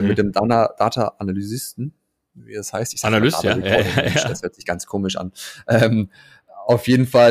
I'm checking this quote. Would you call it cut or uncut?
uncut